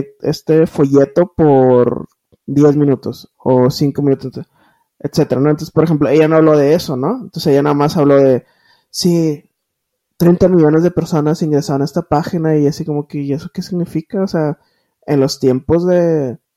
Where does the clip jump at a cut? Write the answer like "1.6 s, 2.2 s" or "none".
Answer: none